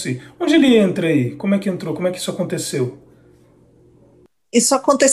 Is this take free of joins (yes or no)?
yes